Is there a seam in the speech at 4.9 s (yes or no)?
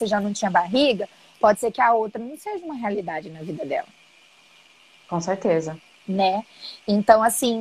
no